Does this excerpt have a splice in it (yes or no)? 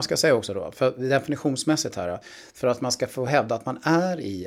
no